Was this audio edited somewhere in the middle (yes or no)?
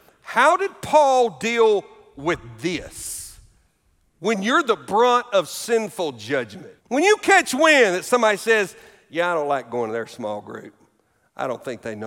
yes